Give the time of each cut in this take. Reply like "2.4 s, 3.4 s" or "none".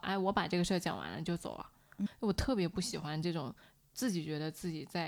2.1 s